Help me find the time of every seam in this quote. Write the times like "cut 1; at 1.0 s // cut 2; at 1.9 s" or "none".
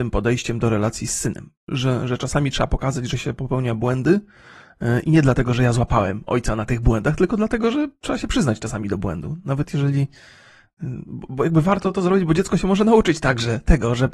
none